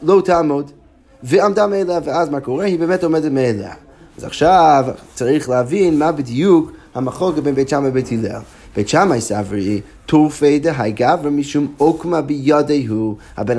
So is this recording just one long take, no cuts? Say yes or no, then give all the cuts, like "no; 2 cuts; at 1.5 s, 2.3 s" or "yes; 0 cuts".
yes; 0 cuts